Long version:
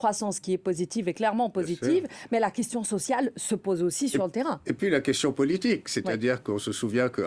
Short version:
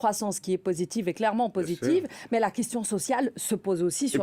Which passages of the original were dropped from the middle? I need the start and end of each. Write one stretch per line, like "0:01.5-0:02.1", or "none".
none